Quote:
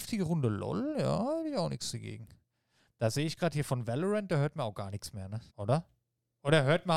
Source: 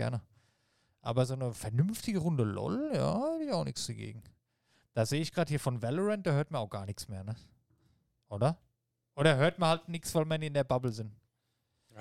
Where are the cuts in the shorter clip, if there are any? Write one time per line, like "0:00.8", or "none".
0:05.5